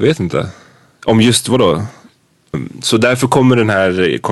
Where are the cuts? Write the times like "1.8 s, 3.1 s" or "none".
2.5 s

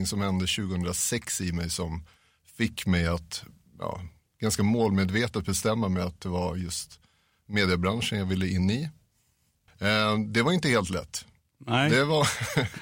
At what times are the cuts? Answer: 9.7 s

